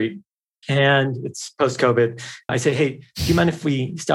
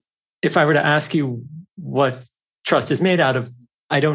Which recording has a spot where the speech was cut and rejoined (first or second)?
first